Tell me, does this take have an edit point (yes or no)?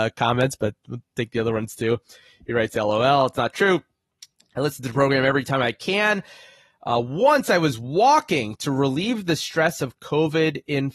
no